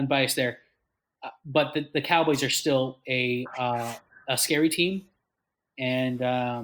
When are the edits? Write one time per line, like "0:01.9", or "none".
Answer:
none